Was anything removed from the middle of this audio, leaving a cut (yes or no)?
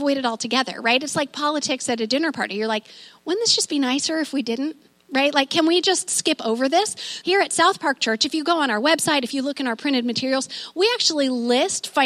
yes